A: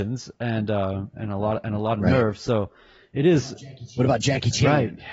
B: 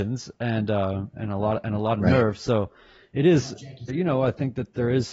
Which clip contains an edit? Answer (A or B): B